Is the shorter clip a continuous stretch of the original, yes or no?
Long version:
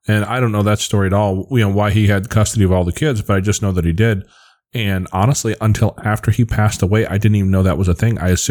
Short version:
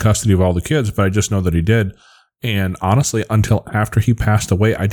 yes